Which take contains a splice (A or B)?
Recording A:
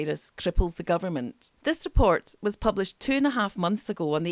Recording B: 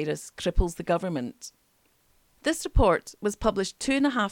A